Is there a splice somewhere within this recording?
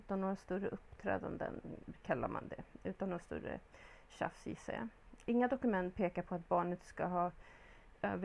no; 0 cuts

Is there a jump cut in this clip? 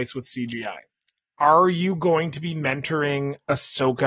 yes; 1 cut; at 1.2 s

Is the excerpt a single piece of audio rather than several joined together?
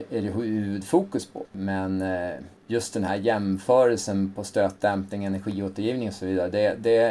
no; 2 cuts; at 1.4 s, 2.6 s

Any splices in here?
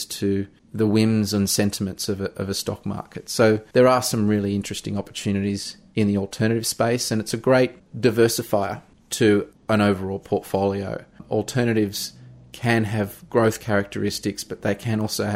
no; 0 cuts

